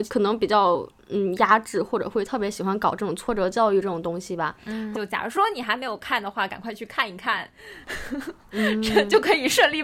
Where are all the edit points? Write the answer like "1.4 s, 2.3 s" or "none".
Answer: 4.9 s